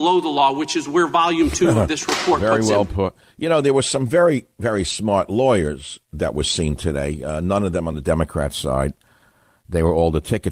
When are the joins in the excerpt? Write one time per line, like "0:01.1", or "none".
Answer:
none

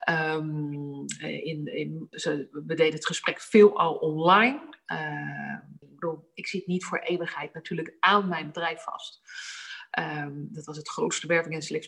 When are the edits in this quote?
0:02.1
0:05.8
0:09.9

